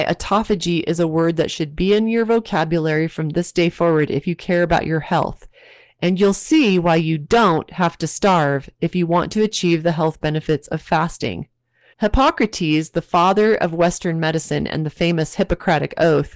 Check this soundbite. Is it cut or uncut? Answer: cut